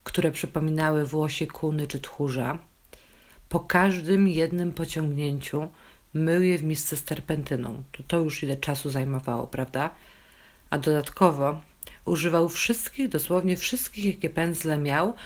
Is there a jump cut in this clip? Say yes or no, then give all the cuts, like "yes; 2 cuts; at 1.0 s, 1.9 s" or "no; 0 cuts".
no; 0 cuts